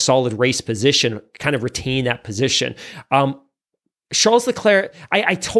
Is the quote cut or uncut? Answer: uncut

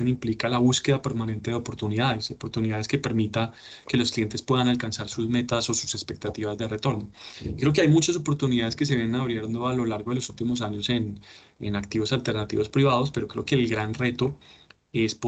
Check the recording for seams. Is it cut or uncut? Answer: uncut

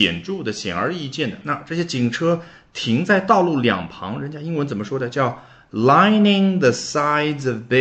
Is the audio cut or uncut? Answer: cut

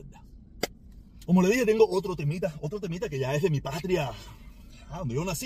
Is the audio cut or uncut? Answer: cut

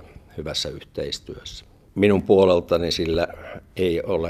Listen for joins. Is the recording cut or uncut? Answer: cut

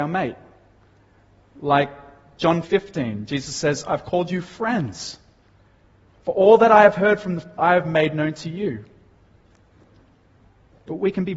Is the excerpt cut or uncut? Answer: cut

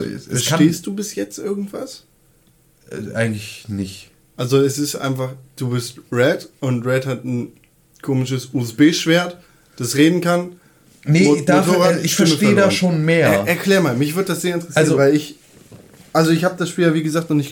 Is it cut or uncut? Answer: uncut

